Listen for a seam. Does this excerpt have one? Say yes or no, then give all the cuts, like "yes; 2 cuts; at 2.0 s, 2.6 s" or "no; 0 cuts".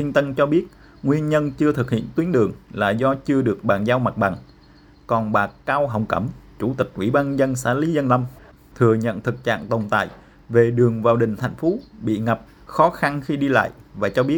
no; 0 cuts